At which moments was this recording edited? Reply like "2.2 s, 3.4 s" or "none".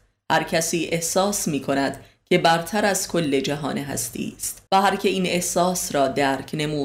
4.7 s